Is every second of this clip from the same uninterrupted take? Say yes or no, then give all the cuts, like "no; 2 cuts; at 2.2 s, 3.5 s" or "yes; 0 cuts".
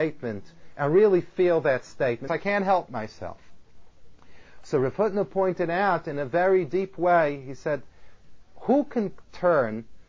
no; 1 cut; at 2.3 s